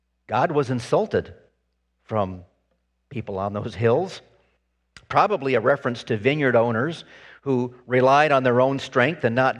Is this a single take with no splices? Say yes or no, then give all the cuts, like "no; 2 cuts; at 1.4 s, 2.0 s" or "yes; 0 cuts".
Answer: yes; 0 cuts